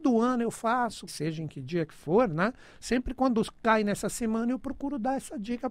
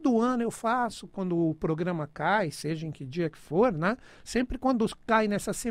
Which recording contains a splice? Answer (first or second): first